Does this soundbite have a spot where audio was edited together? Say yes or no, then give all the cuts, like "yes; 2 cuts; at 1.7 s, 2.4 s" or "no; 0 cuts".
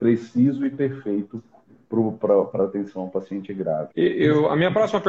yes; 1 cut; at 3.9 s